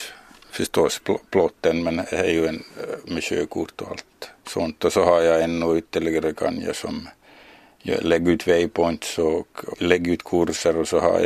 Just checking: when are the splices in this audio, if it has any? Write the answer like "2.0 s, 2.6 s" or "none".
4.4 s, 9.7 s